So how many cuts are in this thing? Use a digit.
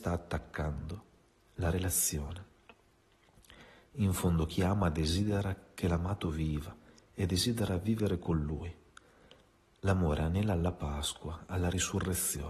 0